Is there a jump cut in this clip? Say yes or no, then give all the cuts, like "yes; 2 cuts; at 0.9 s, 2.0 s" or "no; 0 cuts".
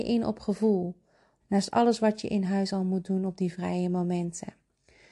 yes; 1 cut; at 1.4 s